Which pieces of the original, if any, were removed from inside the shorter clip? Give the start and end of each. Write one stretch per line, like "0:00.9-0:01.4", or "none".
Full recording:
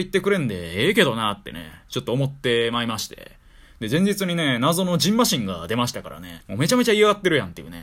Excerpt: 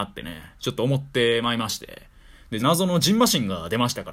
0:03.9-0:04.6